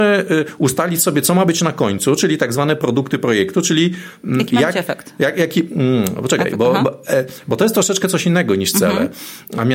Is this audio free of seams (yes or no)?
yes